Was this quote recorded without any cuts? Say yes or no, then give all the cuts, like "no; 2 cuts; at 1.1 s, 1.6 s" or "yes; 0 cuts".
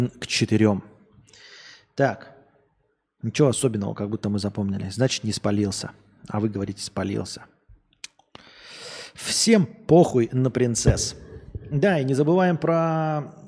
yes; 0 cuts